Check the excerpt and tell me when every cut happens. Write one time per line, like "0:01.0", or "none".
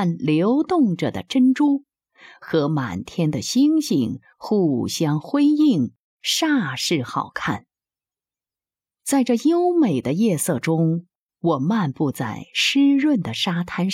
none